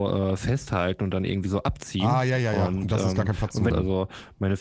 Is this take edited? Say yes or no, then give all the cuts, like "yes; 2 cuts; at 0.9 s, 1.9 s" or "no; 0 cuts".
yes; 1 cut; at 3.7 s